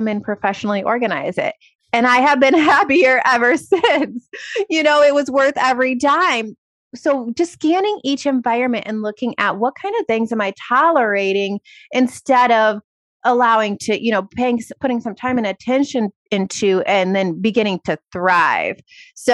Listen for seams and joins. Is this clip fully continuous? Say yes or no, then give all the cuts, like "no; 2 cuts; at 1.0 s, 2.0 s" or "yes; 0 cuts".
yes; 0 cuts